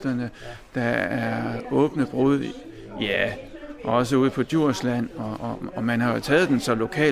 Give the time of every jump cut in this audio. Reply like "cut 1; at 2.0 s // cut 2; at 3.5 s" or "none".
none